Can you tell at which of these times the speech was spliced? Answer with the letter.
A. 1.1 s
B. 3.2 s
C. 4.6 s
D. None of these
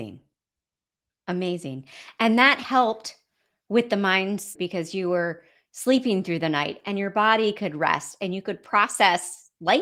C